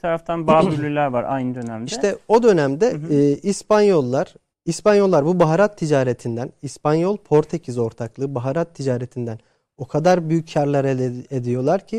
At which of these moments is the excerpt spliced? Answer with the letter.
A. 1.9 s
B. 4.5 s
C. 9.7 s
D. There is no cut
B